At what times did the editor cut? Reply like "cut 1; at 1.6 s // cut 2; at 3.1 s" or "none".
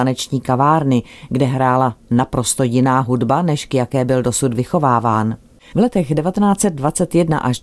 cut 1; at 5.7 s